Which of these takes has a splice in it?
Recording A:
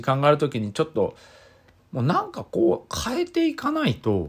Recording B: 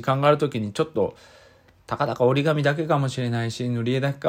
A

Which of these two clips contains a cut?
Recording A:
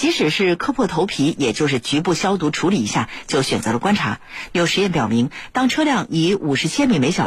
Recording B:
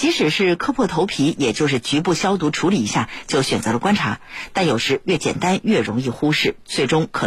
A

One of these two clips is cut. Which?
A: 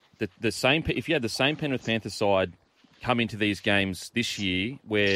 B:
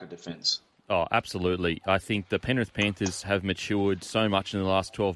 A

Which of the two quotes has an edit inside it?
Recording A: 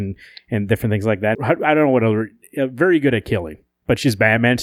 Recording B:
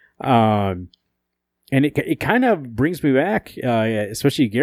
A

